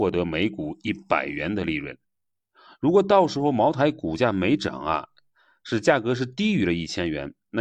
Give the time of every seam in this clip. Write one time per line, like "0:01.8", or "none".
none